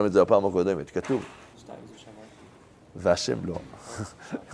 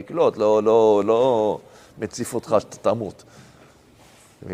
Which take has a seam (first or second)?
first